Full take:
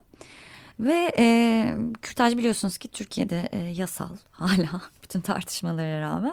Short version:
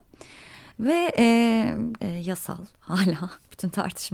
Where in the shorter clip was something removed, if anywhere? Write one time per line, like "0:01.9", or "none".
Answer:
0:02.0